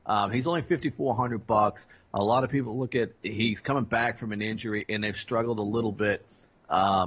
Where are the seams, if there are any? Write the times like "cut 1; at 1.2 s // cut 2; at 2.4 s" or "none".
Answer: cut 1; at 3.2 s